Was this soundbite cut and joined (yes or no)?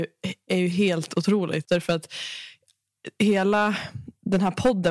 yes